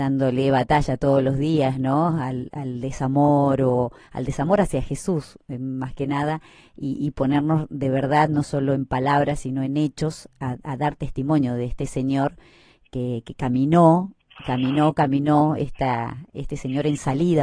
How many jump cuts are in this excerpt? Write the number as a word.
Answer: zero